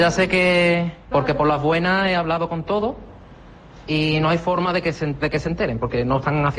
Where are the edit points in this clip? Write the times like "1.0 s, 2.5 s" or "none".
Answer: 1.1 s, 5.2 s